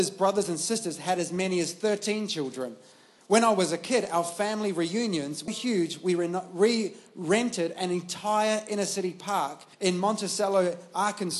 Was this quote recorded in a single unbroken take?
no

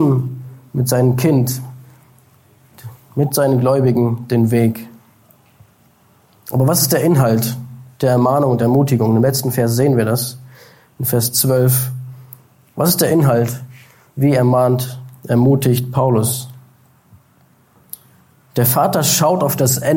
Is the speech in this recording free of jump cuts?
yes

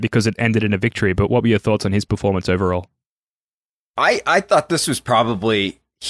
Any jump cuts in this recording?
no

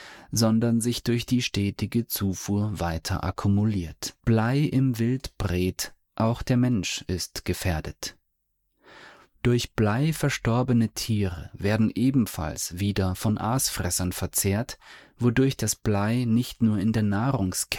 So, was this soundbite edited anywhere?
yes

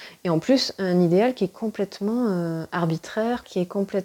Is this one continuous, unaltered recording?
yes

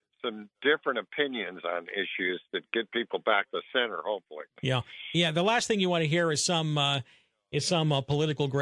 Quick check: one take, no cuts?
yes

